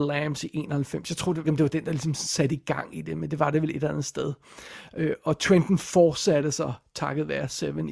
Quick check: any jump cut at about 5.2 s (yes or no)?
no